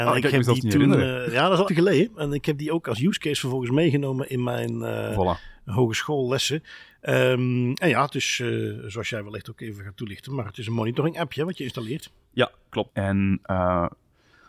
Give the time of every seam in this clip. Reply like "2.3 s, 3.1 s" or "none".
1.7 s, 12.9 s